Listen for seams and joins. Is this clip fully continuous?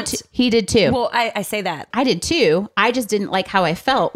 no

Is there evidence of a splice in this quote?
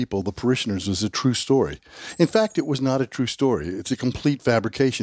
no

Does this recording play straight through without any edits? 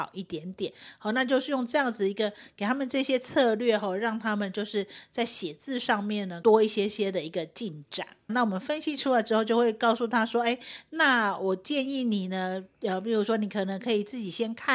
no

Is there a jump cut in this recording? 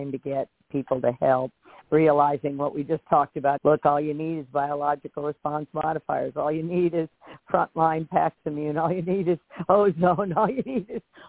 yes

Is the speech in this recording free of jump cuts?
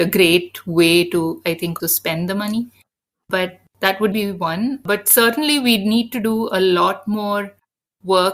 no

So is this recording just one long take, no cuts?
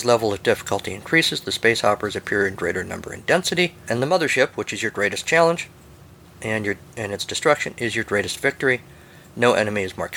yes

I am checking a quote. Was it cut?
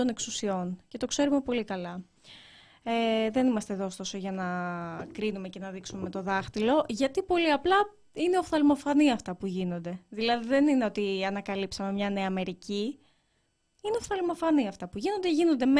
no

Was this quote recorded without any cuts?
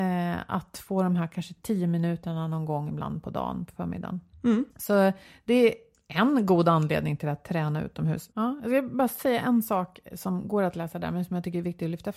no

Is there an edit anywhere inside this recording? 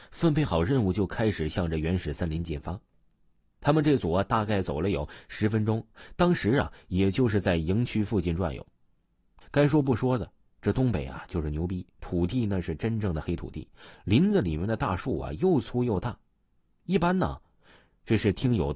yes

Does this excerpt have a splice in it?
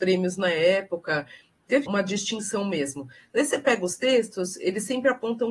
yes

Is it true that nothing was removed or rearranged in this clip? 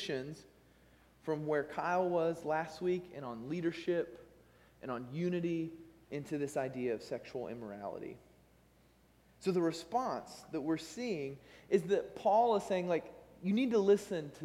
yes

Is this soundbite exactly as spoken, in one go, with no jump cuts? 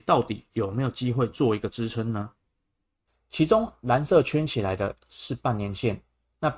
yes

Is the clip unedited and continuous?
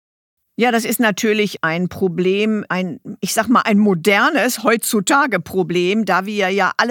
no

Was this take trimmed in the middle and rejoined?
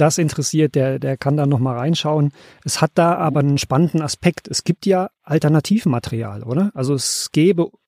no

